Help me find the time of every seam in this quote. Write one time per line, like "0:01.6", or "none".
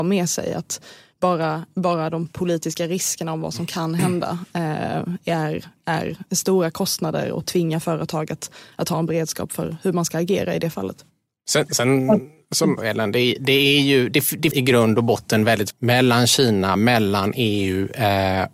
0:12.8
0:14.5
0:15.7